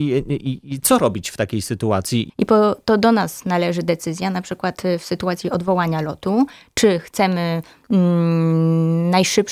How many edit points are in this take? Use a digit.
1